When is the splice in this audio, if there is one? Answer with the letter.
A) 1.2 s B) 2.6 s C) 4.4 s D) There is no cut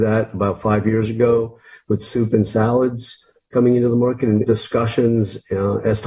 C